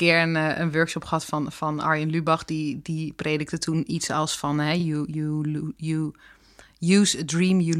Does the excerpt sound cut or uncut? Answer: uncut